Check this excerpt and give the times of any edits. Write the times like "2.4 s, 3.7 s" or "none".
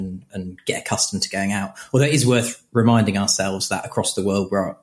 none

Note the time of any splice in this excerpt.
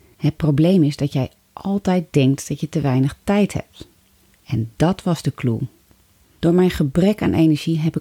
6.2 s

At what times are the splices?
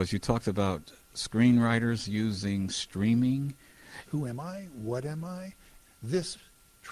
4.1 s, 5.8 s

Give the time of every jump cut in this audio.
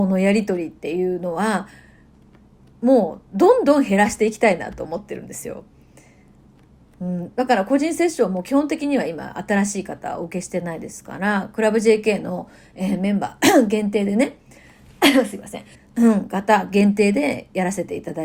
15.7 s

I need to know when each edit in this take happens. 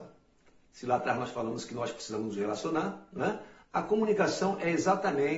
3.6 s

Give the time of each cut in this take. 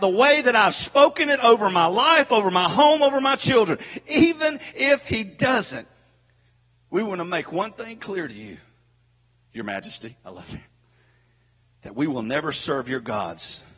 none

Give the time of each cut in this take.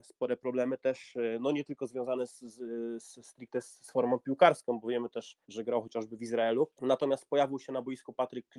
5.4 s, 6.7 s

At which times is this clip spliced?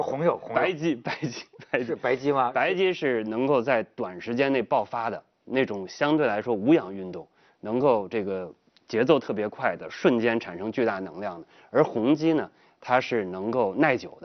none

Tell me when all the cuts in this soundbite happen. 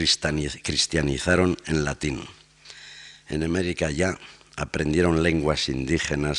none

